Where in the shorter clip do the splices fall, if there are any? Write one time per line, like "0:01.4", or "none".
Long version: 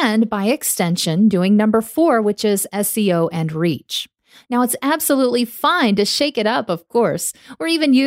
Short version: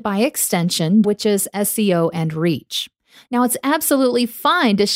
0:01.0